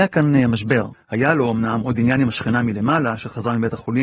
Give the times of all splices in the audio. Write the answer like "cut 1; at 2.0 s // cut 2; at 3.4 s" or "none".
cut 1; at 0.9 s